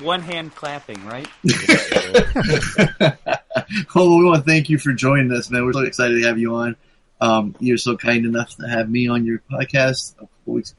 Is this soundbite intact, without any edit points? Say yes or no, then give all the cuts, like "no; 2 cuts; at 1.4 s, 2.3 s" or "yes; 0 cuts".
no; 1 cut; at 5.7 s